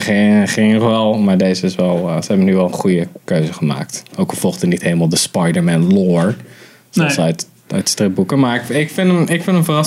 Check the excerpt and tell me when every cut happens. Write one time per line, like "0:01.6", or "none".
none